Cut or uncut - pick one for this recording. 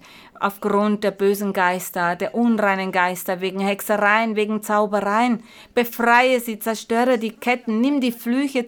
uncut